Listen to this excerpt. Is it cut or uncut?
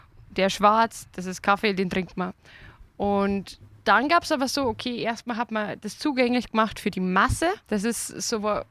cut